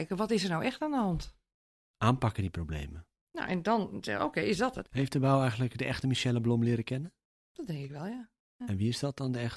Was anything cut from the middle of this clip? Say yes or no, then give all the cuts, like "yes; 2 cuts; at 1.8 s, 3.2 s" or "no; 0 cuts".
yes; 1 cut; at 4.9 s